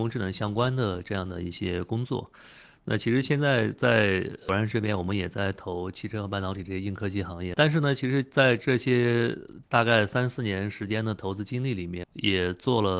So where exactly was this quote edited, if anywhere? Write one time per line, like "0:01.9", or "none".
0:07.5
0:12.0